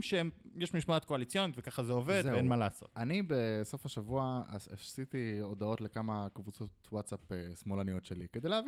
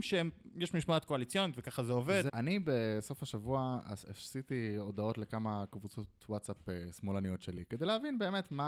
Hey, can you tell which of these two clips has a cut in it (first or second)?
second